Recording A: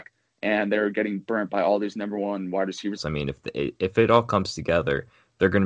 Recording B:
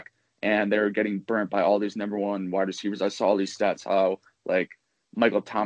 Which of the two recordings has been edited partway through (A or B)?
A